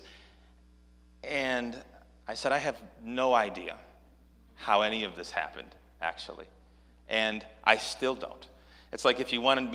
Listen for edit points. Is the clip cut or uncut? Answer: uncut